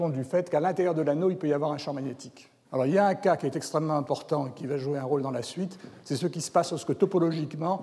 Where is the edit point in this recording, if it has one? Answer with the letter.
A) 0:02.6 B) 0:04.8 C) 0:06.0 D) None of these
A